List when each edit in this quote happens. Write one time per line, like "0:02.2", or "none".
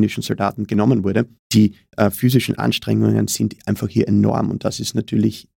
0:01.4

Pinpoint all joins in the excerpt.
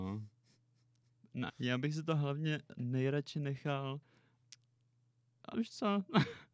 0:01.5
0:05.5

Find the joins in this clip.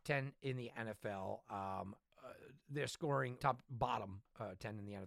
0:03.4

